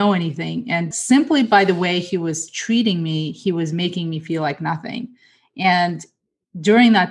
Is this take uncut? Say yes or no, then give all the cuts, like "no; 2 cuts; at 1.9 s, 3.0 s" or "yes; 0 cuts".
no; 1 cut; at 0.9 s